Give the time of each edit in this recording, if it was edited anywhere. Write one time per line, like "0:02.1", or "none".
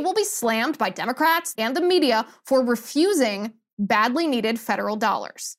0:01.5